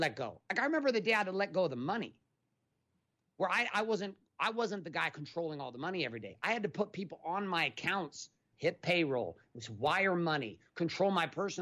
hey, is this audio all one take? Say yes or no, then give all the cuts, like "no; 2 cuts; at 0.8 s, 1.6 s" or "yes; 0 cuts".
no; 1 cut; at 8.5 s